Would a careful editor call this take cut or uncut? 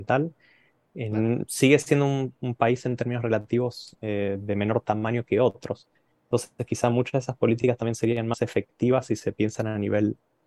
uncut